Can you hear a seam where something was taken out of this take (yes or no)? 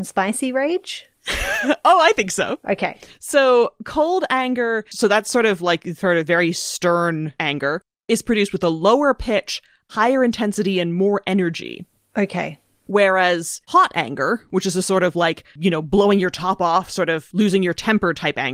no